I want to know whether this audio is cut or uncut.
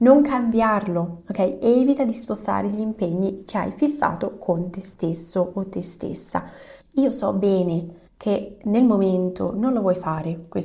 cut